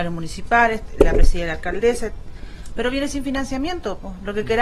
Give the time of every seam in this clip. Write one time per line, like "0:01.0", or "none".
0:02.7